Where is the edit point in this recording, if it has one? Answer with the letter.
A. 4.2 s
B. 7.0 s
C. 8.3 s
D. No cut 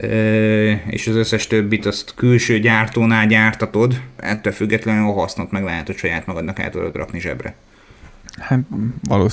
A